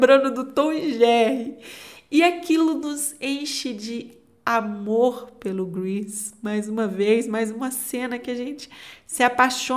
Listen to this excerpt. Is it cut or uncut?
uncut